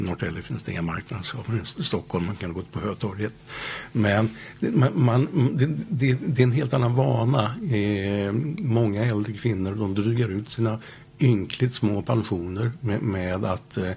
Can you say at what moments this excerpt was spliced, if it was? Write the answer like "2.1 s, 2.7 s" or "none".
11.1 s